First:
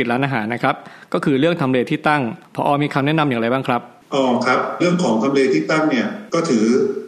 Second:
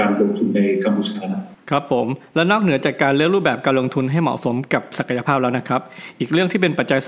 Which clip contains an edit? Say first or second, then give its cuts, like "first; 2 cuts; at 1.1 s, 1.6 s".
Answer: first; 1 cut; at 4.8 s